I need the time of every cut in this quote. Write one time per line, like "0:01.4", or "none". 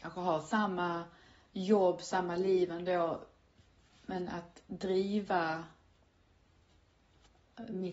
none